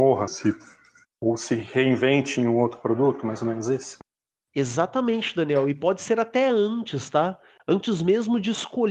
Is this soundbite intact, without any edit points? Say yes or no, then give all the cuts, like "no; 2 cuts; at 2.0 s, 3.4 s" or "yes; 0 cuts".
yes; 0 cuts